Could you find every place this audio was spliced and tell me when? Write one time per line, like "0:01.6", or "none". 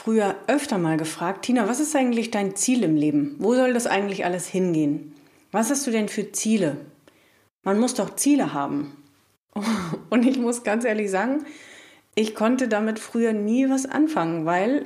none